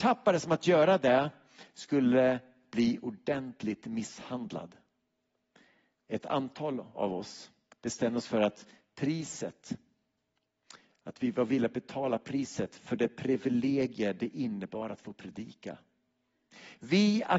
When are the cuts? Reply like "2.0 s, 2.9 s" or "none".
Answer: none